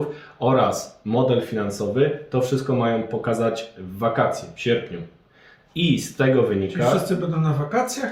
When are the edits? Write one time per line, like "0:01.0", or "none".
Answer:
none